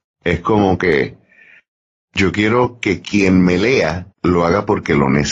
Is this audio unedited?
no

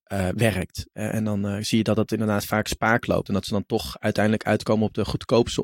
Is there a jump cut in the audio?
no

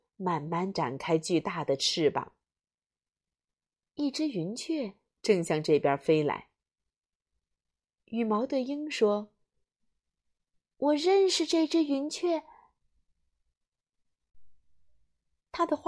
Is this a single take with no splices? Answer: yes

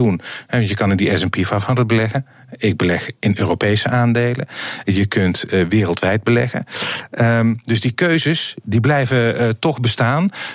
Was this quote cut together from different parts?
no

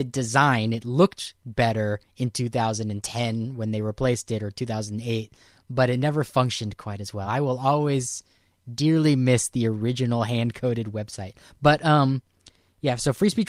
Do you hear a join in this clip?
no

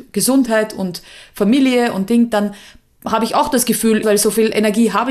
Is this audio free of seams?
no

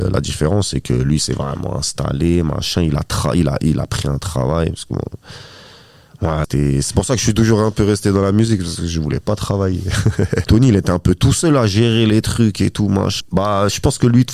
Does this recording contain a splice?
yes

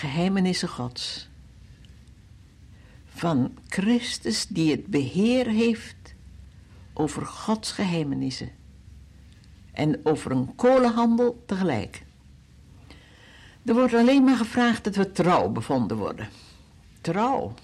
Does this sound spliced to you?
no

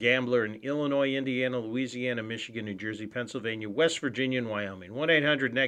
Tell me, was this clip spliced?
no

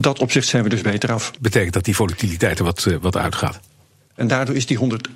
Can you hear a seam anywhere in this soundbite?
yes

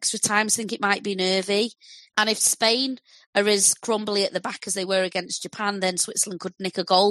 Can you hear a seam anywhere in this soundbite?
no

